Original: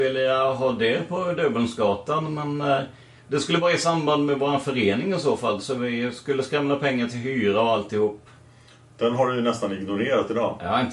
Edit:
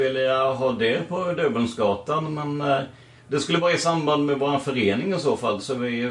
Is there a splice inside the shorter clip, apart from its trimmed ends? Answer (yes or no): no